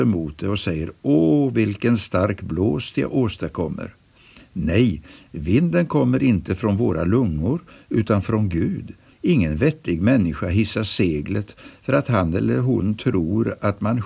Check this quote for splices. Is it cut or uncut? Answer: cut